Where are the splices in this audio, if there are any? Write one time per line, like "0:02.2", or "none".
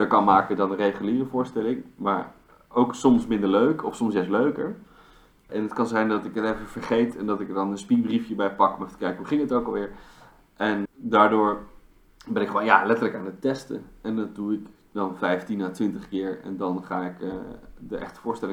0:05.5
0:10.9